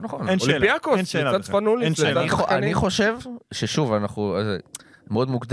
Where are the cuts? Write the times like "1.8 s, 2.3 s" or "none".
none